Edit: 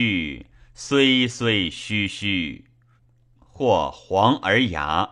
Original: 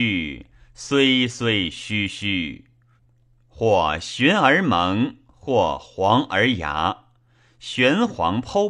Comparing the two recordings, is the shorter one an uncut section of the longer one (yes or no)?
no